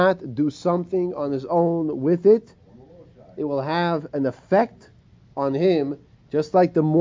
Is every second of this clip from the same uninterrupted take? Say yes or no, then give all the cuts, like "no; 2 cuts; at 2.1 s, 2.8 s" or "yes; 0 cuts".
yes; 0 cuts